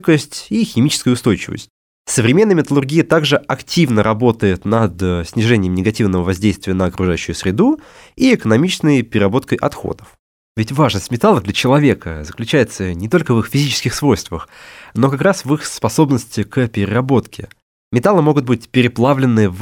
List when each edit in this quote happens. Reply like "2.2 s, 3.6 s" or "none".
none